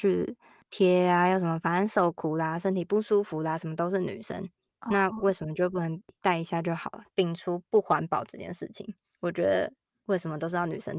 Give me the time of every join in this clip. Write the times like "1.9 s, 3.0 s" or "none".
7.7 s